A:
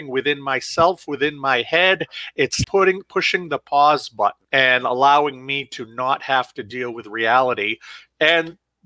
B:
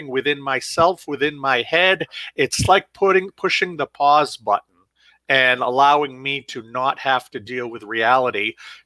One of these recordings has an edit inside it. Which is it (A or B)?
A